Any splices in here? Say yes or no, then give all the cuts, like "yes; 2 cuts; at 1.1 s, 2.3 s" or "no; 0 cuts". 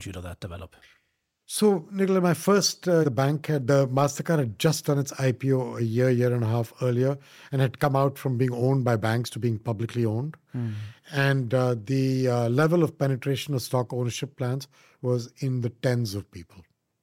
yes; 1 cut; at 3.0 s